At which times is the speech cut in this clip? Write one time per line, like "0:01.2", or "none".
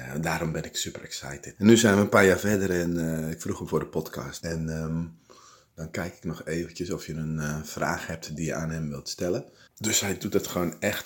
0:01.6
0:04.4
0:09.7